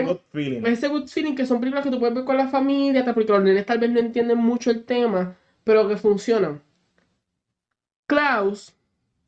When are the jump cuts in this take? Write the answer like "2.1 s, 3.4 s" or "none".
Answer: none